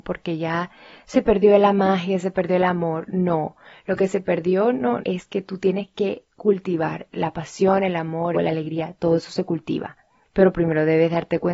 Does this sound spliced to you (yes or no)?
yes